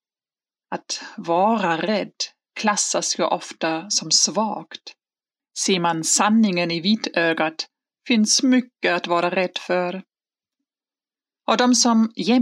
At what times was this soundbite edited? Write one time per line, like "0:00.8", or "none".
0:05.4